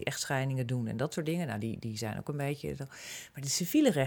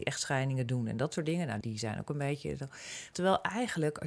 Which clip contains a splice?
second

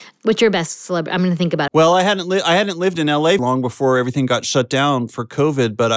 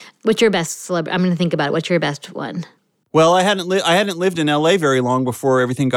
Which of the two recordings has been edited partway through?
first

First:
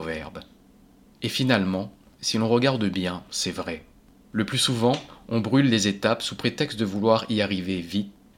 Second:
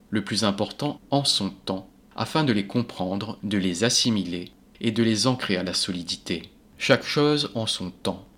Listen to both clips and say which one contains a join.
second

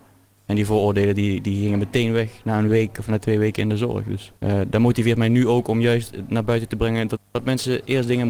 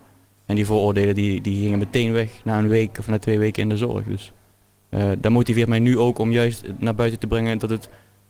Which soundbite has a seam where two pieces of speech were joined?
first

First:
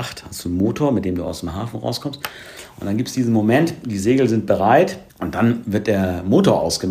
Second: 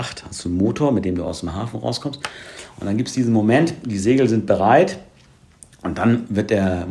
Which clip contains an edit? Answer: first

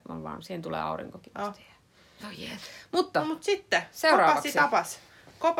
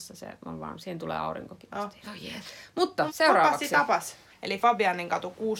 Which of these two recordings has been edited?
second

